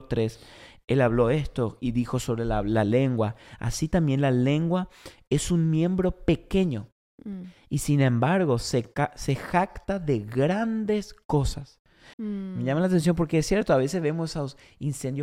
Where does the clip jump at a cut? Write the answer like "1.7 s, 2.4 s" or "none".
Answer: 12.1 s